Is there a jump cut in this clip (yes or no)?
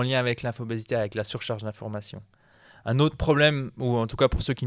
no